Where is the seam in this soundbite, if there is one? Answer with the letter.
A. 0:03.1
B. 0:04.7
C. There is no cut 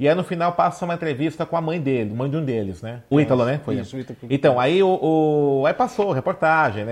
A